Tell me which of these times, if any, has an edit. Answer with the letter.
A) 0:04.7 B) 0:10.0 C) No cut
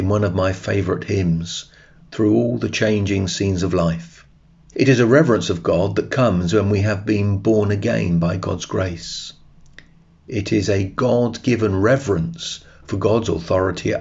A